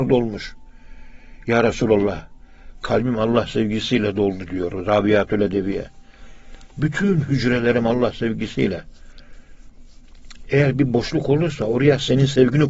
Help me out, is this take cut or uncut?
uncut